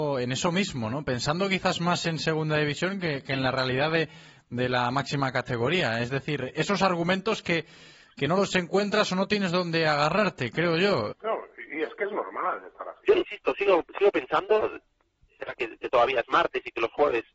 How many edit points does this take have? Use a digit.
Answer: 3